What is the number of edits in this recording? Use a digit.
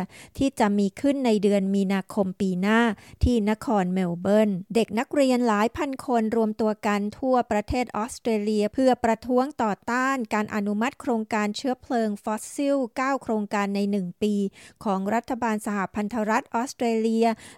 1